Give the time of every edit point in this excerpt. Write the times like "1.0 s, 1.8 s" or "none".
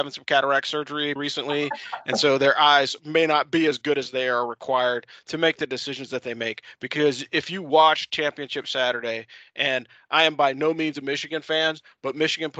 1.2 s